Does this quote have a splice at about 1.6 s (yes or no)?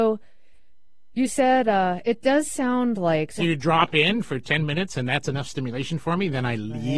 no